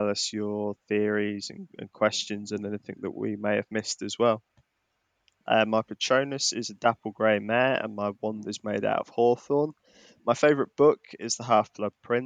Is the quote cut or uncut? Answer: cut